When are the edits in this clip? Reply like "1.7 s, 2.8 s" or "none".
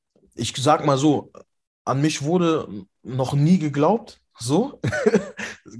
none

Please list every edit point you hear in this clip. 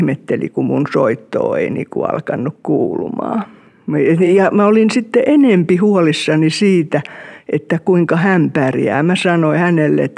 none

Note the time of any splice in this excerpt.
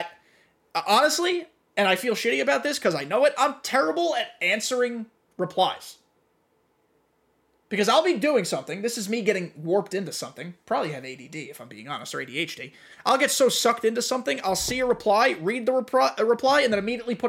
none

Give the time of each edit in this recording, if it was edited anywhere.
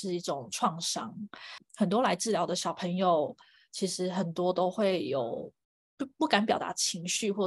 none

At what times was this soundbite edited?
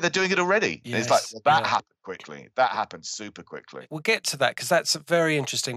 none

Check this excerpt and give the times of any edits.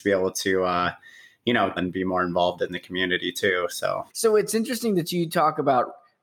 1.8 s, 4.1 s

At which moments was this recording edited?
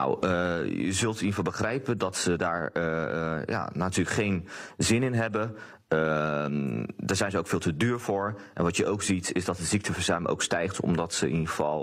none

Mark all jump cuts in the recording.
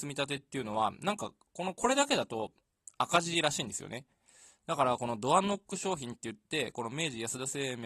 none

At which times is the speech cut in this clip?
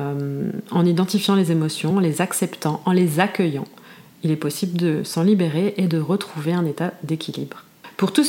none

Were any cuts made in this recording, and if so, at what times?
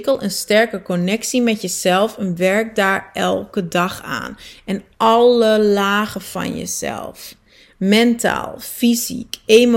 none

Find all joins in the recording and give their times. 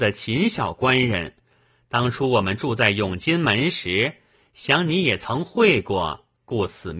none

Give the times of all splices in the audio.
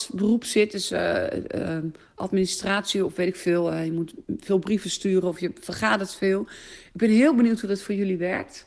none

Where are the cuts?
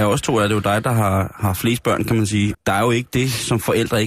2.5 s

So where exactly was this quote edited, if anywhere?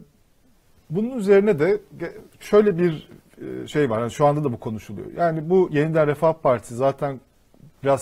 none

